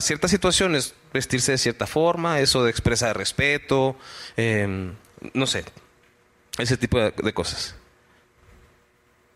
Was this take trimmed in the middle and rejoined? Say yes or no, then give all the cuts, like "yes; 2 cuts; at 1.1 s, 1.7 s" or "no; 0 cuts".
no; 0 cuts